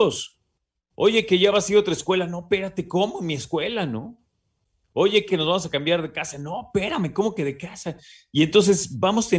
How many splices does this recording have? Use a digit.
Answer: 1